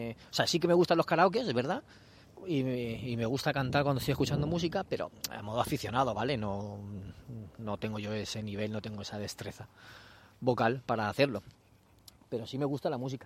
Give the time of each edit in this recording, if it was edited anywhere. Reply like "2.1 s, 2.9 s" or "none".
none